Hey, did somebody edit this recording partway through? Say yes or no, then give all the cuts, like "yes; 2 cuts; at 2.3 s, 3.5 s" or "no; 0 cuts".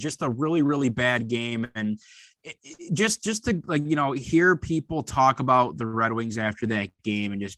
no; 0 cuts